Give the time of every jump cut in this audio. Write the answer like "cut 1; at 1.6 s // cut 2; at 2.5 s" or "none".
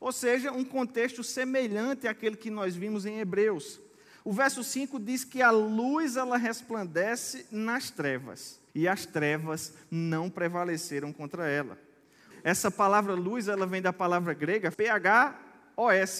cut 1; at 8.7 s // cut 2; at 12.3 s // cut 3; at 14.7 s